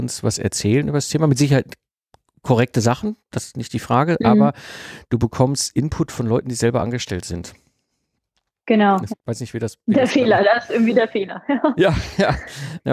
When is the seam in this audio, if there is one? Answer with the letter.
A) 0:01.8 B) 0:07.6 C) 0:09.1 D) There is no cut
C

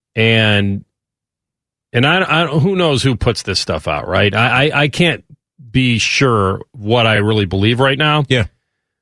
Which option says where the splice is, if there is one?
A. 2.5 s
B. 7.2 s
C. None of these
C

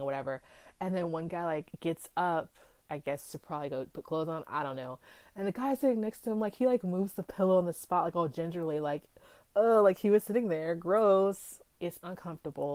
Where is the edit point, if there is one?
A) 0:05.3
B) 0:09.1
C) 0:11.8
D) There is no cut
C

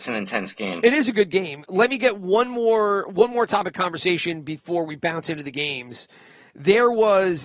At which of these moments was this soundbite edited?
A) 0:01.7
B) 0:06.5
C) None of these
C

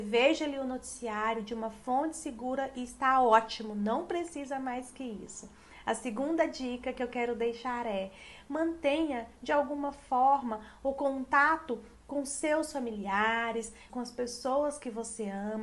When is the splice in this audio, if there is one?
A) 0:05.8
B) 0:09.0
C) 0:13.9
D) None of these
C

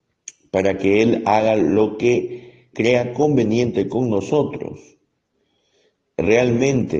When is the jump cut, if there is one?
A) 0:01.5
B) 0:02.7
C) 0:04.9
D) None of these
B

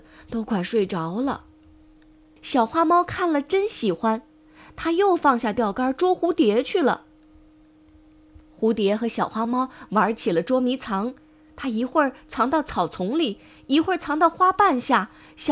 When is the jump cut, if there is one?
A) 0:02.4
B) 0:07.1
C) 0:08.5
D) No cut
A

